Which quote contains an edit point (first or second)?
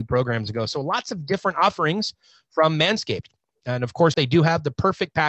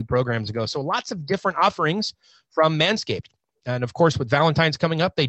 first